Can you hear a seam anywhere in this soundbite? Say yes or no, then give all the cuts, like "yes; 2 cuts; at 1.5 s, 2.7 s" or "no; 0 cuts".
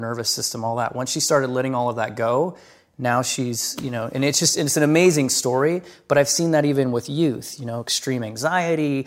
no; 0 cuts